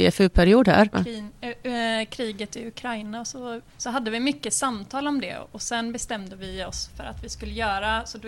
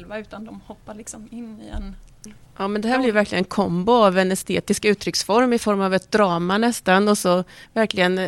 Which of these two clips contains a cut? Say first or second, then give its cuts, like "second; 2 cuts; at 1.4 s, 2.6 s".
first; 2 cuts; at 0.9 s, 3.7 s